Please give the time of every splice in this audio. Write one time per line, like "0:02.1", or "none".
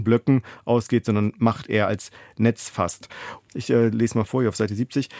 0:03.4